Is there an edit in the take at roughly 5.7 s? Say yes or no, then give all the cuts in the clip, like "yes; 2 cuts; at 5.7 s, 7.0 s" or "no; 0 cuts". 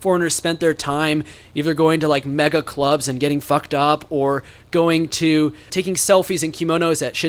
yes; 1 cut; at 5.7 s